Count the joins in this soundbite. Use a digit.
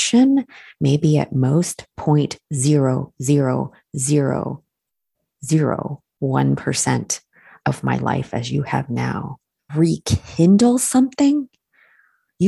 1